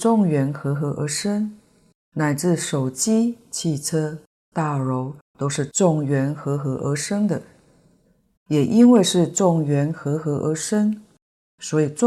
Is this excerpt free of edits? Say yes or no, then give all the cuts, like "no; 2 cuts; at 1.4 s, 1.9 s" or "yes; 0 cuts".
no; 2 cuts; at 2.0 s, 8.4 s